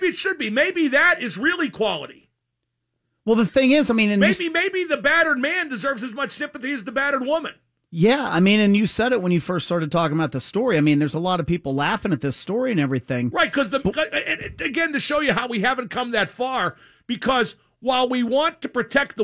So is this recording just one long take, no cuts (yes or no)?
yes